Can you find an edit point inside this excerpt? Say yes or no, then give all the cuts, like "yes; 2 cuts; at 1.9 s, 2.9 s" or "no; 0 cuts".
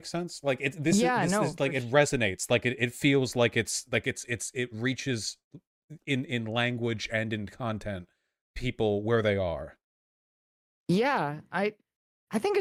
no; 0 cuts